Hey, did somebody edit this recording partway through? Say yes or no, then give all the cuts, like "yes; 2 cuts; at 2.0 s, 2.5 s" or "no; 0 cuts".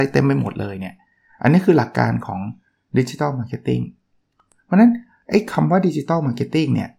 no; 0 cuts